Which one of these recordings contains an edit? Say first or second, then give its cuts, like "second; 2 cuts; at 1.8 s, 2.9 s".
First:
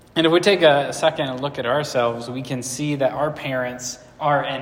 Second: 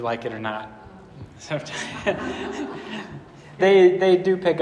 second; 1 cut; at 3.6 s